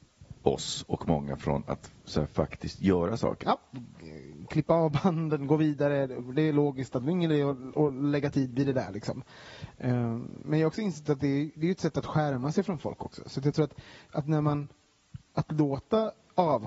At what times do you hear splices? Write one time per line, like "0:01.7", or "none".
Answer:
0:03.4